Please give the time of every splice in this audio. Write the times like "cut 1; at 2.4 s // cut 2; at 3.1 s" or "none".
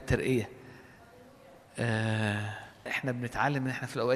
cut 1; at 2.9 s